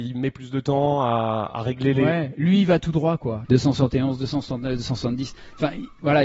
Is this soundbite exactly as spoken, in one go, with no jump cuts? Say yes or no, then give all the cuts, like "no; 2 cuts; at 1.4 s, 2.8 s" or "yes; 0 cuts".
no; 1 cut; at 3.4 s